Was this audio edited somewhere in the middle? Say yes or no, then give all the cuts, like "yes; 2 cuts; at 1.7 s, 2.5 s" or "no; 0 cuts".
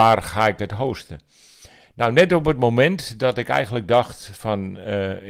no; 0 cuts